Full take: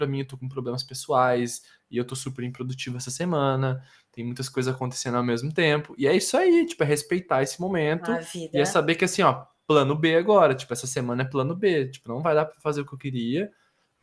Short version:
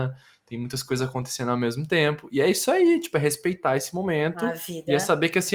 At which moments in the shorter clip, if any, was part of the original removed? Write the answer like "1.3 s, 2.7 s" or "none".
none